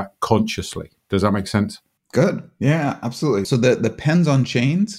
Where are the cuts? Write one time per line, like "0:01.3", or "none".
0:03.4